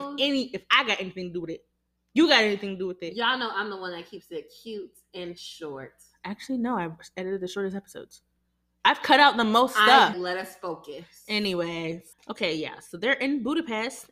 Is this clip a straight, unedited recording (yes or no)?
no